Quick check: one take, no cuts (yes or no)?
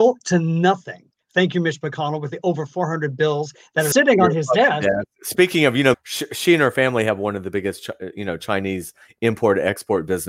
no